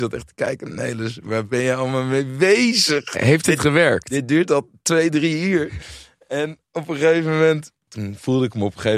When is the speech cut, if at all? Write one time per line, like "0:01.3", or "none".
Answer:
none